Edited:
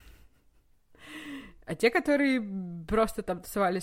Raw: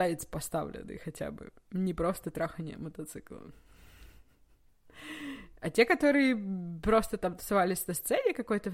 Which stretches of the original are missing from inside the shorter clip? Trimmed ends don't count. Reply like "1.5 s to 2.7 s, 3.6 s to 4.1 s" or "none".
none

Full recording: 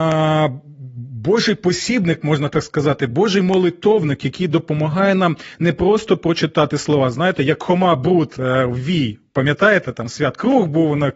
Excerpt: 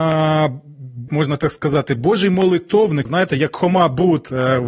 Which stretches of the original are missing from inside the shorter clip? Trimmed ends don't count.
1.1 s to 2.2 s, 4.2 s to 7.1 s

